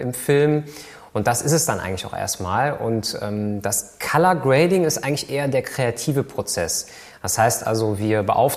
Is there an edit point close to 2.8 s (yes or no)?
no